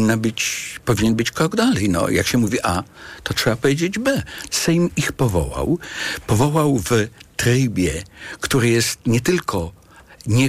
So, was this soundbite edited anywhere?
yes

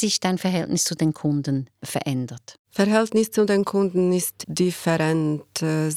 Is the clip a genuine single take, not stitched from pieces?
no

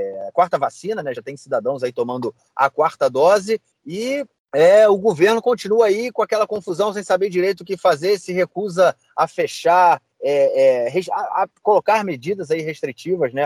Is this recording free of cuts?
yes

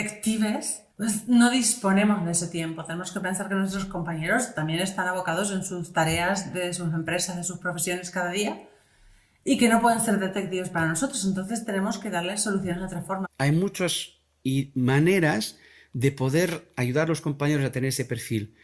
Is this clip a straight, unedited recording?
no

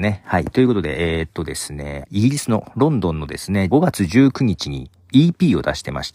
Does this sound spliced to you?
yes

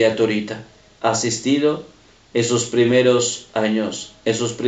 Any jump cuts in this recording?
yes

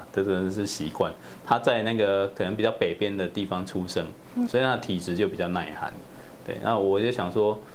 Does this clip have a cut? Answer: yes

